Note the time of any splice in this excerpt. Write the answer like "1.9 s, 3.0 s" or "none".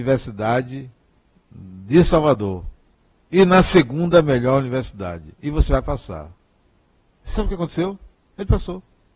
8.2 s